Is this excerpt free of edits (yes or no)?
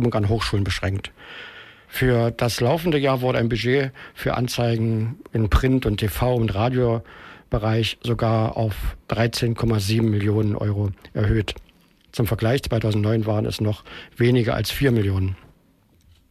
no